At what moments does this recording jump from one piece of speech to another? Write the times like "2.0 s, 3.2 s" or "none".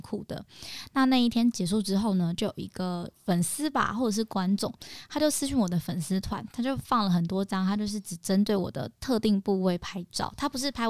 none